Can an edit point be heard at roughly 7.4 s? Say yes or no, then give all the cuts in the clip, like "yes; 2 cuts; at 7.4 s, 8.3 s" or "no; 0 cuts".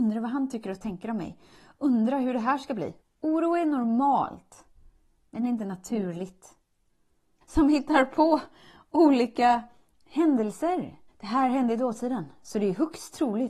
yes; 3 cuts; at 3.0 s, 7.4 s, 11.1 s